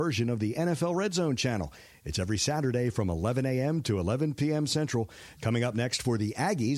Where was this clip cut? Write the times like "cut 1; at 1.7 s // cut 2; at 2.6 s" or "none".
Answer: cut 1; at 5.4 s